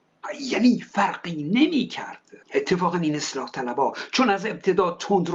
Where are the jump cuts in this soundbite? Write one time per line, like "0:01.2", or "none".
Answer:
0:02.4